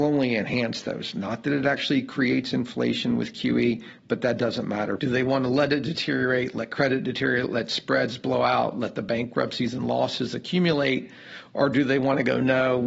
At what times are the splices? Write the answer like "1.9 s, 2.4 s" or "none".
5.0 s